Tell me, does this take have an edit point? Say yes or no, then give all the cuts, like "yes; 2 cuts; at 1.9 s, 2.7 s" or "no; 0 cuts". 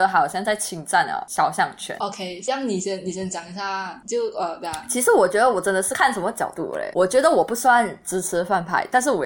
yes; 1 cut; at 2.0 s